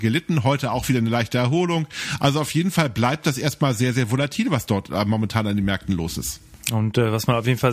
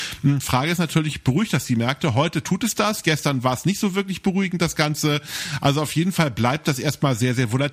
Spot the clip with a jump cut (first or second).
first